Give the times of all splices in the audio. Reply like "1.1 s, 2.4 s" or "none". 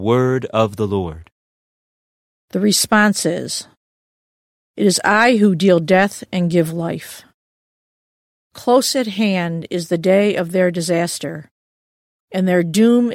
2.4 s